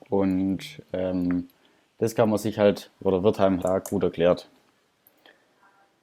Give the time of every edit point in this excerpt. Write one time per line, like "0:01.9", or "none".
0:03.6